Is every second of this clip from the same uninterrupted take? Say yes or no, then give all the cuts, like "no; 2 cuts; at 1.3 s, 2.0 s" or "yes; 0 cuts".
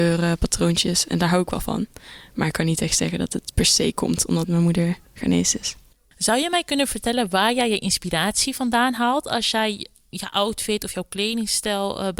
yes; 0 cuts